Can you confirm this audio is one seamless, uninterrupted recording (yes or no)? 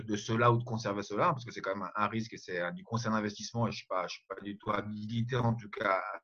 yes